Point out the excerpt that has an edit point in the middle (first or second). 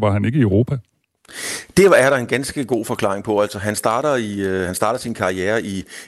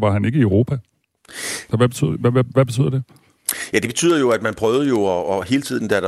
second